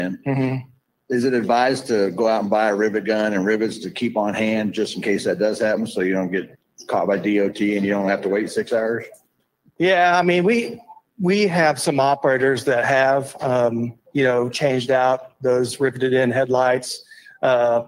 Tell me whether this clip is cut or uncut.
uncut